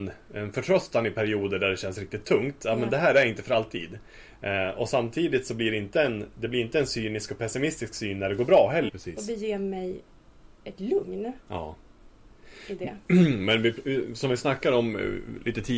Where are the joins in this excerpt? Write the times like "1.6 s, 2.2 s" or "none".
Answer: 8.9 s

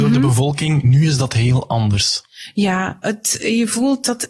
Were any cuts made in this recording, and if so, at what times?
none

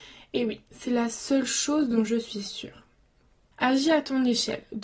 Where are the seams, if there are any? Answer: 3.5 s

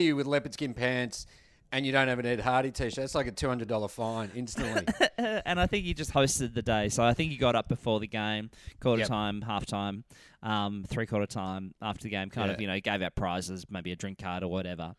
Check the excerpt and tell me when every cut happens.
none

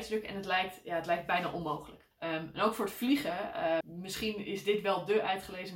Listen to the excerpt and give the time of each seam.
2.1 s, 3.8 s

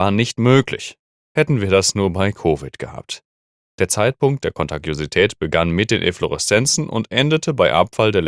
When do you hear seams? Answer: none

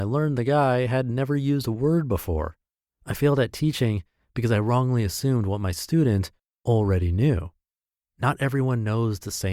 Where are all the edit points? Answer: none

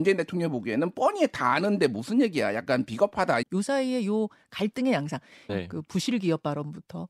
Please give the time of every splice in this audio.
3.4 s, 5.5 s

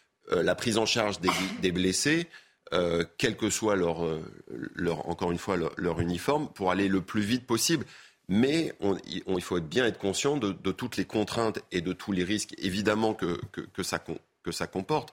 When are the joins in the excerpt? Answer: none

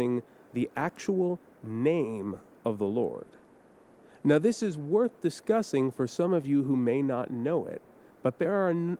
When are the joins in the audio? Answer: none

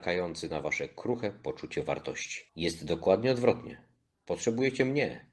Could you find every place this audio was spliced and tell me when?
2.5 s

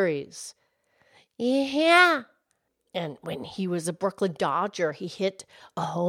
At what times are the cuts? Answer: none

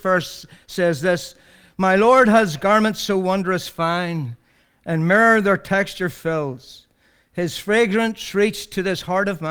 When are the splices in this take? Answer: none

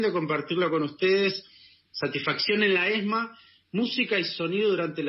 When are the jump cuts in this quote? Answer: none

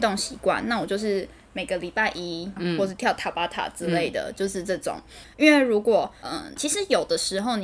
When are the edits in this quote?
2.6 s, 5.2 s, 6.6 s

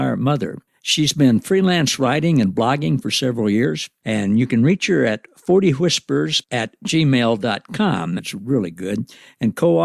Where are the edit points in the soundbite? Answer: 4.0 s, 8.2 s

